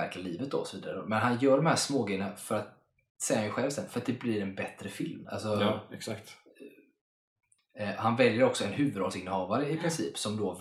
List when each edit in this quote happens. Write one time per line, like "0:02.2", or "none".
0:05.2
0:07.6